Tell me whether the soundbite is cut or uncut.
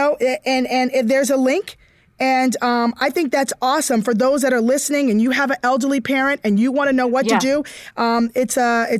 uncut